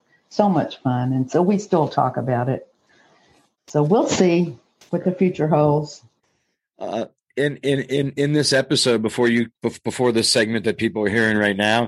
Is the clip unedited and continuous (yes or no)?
yes